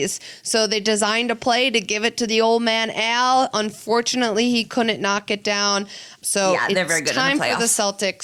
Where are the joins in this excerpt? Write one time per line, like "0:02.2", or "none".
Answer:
0:06.2